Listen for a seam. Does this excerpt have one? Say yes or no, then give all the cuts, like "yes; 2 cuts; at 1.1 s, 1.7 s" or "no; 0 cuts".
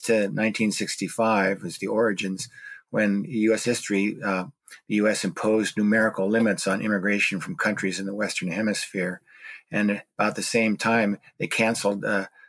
yes; 1 cut; at 3.6 s